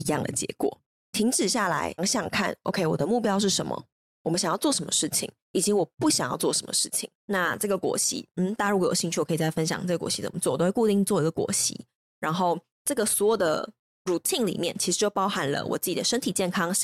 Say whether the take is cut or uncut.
cut